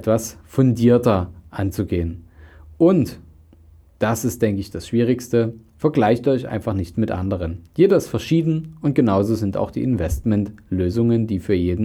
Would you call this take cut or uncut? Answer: uncut